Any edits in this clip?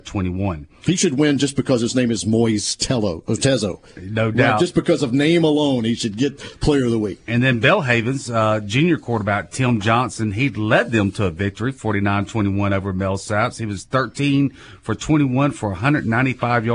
no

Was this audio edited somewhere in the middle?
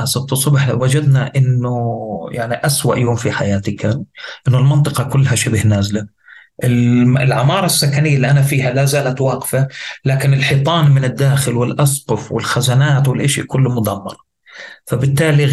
no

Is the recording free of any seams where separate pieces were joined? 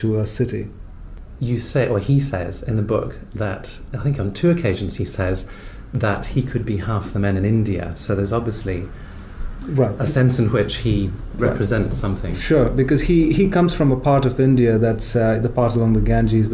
yes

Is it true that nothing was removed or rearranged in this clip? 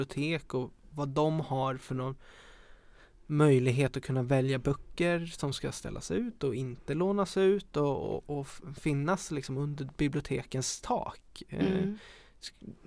yes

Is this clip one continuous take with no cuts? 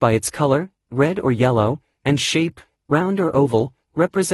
yes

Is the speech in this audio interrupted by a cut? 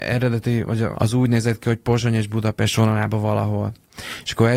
yes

